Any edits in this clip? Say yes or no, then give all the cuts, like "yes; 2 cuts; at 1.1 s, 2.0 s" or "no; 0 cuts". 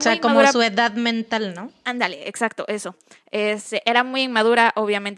no; 0 cuts